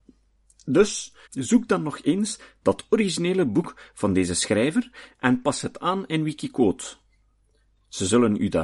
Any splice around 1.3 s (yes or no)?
yes